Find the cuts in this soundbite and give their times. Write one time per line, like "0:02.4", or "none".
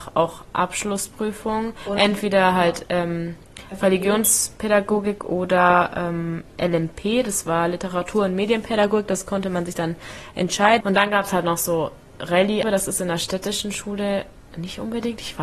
0:10.8
0:12.6